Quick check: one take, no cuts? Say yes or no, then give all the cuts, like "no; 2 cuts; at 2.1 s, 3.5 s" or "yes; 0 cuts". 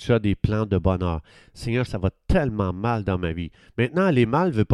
no; 1 cut; at 1.9 s